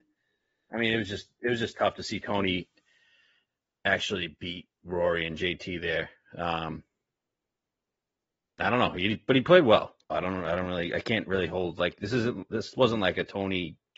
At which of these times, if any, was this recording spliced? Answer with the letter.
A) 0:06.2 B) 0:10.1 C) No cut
B